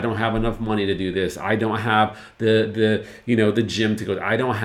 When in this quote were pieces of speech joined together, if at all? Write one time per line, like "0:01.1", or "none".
none